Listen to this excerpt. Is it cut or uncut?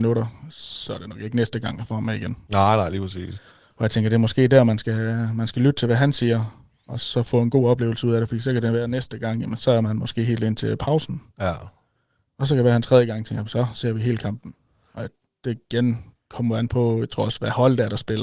uncut